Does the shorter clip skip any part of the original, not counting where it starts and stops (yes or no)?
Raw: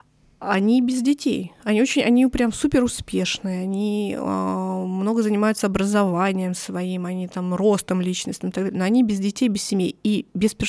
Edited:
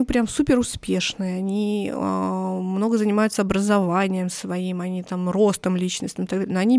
no